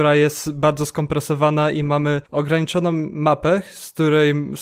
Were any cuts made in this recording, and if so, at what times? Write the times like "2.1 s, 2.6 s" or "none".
2.3 s